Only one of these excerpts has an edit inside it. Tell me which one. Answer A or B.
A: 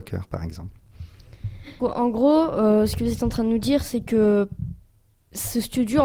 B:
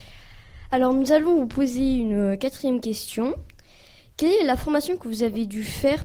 A